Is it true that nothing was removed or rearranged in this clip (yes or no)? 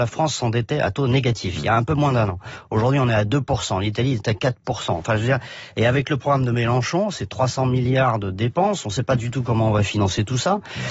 yes